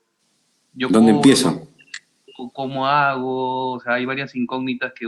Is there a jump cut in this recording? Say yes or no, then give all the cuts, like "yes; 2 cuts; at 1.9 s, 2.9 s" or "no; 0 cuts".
no; 0 cuts